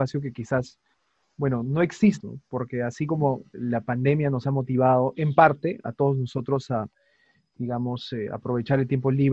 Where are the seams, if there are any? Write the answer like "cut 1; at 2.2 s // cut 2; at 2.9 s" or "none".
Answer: cut 1; at 2.2 s